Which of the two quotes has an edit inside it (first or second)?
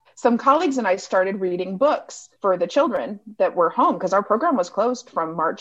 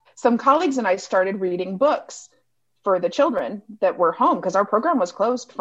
first